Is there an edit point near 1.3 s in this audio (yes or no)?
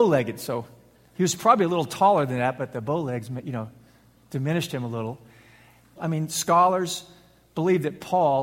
no